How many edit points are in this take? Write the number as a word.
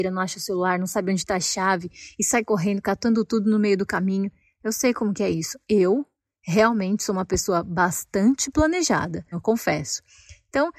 one